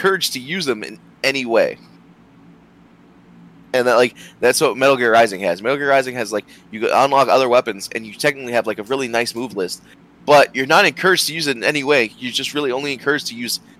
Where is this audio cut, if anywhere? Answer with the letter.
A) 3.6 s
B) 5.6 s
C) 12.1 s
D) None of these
D